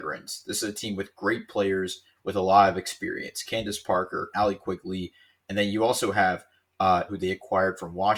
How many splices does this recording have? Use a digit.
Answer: 2